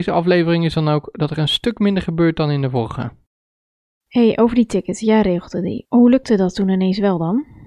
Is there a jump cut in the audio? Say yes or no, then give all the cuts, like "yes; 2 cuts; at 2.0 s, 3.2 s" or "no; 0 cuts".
no; 0 cuts